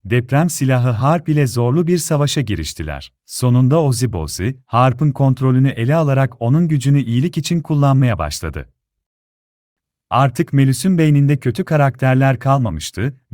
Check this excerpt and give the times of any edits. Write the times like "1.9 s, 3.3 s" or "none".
3.2 s